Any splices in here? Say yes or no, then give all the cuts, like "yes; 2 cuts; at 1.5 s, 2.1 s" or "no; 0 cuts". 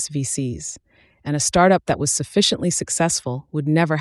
no; 0 cuts